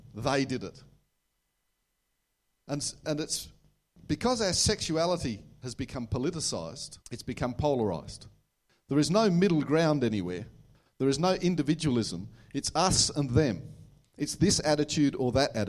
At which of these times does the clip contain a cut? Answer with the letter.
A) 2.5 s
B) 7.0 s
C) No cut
B